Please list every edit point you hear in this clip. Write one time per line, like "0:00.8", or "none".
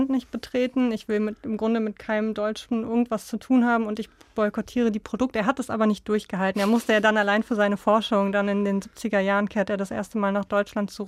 none